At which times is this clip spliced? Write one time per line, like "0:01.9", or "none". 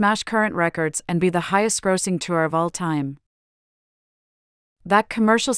none